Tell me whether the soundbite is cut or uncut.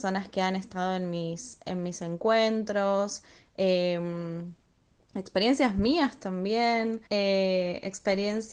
cut